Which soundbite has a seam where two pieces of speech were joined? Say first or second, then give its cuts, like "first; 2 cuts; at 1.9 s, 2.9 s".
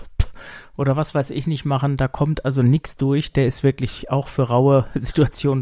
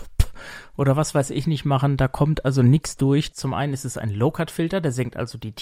second; 1 cut; at 3.3 s